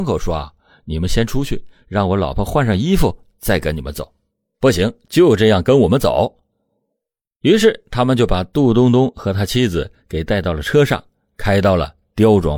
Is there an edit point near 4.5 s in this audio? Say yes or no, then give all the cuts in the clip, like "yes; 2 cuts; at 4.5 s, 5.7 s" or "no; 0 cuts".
yes; 1 cut; at 4.5 s